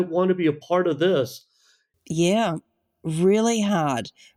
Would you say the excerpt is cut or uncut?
cut